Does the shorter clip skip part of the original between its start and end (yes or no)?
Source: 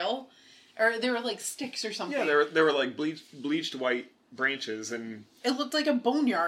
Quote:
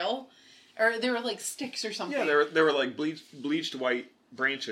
no